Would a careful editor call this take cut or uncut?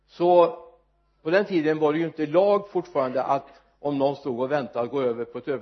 uncut